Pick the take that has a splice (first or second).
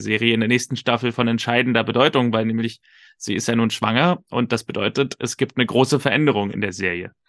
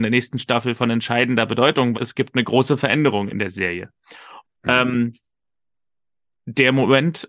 second